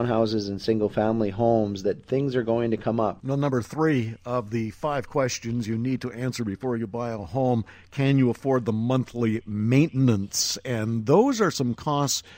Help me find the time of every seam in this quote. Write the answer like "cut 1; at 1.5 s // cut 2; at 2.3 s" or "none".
cut 1; at 3.2 s